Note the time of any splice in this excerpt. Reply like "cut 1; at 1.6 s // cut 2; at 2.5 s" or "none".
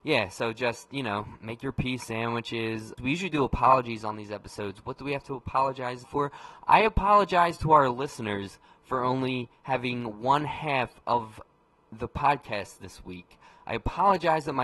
cut 1; at 3.0 s // cut 2; at 6.0 s